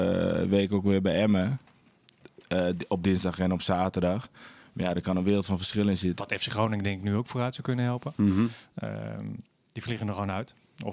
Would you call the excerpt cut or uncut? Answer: cut